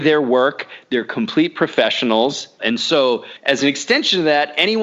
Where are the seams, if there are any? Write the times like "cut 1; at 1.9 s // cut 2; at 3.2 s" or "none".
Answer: cut 1; at 2.6 s